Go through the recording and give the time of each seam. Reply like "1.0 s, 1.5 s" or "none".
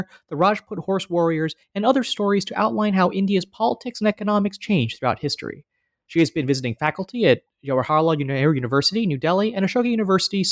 6.1 s